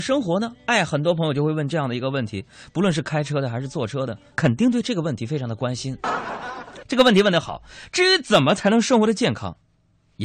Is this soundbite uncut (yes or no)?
no